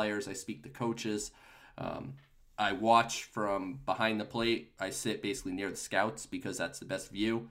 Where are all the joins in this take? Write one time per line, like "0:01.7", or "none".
none